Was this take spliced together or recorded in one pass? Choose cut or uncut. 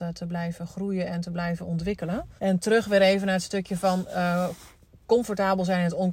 cut